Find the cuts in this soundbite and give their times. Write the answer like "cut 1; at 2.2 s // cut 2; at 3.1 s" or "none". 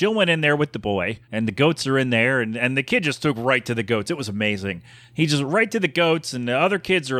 cut 1; at 1.2 s